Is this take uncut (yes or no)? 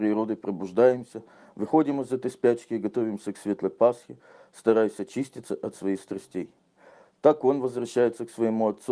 yes